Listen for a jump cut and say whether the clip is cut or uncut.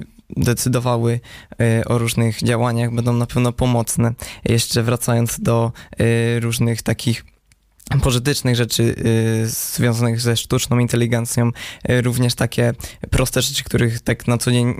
uncut